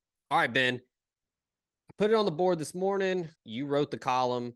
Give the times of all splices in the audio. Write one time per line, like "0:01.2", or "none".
0:03.4